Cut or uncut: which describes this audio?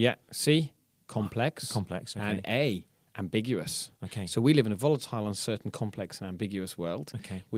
uncut